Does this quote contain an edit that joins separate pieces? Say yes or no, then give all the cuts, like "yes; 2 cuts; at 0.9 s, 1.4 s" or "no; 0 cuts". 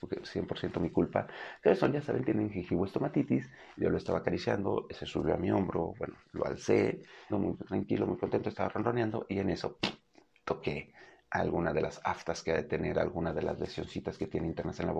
yes; 1 cut; at 7.3 s